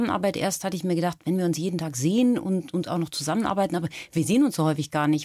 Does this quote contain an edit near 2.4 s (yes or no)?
no